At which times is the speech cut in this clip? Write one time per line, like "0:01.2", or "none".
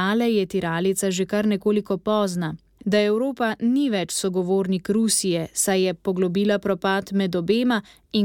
0:02.8